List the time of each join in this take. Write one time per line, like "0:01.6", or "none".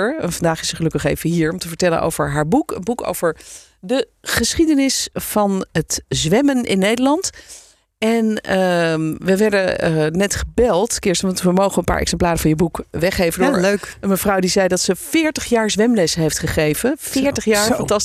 none